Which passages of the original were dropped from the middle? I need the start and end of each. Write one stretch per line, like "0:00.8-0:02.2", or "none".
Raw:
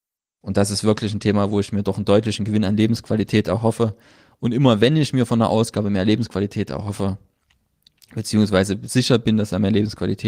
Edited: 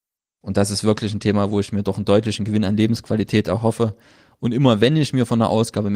none